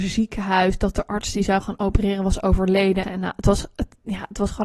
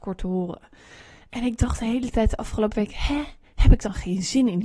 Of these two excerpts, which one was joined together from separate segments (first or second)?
first